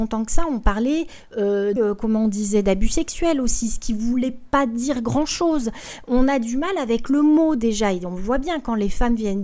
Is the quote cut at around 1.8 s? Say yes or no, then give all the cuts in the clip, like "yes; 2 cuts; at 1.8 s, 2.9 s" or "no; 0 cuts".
yes; 1 cut; at 1.8 s